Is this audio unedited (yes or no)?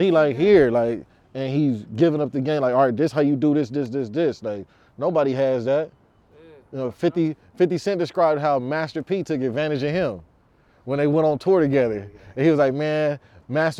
no